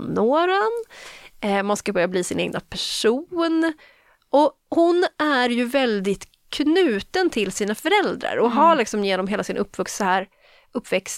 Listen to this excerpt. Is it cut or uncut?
uncut